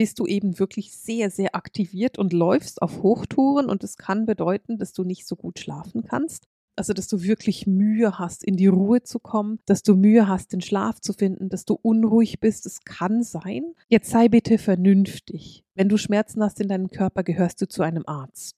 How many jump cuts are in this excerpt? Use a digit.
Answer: 1